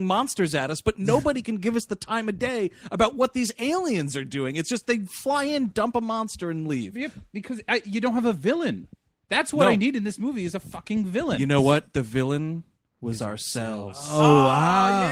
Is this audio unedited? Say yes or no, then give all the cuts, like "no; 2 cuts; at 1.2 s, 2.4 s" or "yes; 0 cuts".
yes; 0 cuts